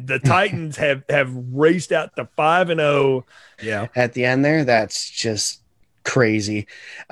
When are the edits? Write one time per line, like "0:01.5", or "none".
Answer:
0:03.6